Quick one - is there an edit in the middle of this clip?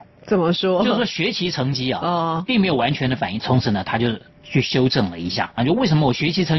yes; 2 cuts; at 3.4 s, 5.6 s

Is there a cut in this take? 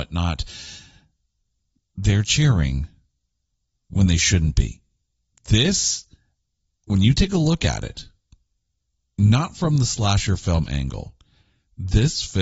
yes; 1 cut; at 5.3 s

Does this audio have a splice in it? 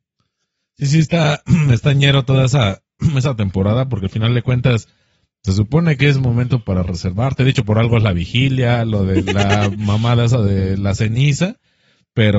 no; 0 cuts

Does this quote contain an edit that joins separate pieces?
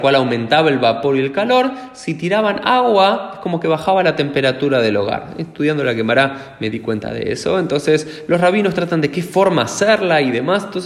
no; 0 cuts

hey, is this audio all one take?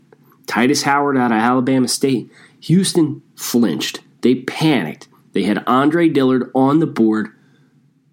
yes; 0 cuts

